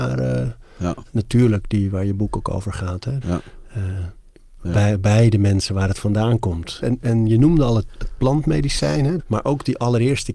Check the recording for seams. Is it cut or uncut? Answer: cut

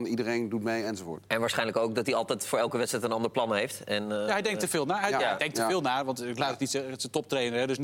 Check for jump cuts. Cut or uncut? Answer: uncut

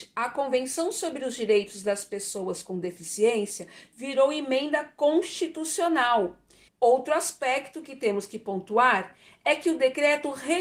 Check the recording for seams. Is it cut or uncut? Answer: cut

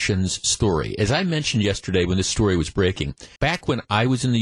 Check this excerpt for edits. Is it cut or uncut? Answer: cut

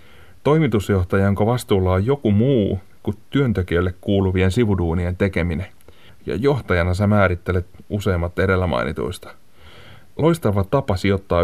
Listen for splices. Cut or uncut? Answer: cut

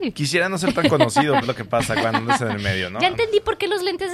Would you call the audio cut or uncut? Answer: cut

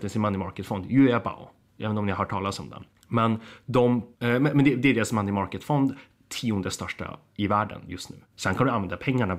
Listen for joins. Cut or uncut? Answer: cut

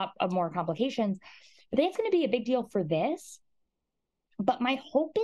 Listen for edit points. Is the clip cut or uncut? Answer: uncut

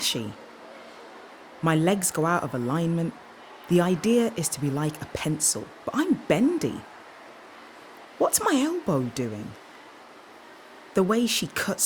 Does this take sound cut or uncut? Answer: uncut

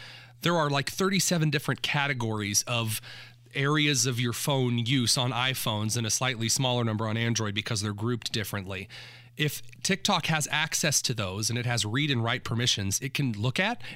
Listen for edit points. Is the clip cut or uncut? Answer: uncut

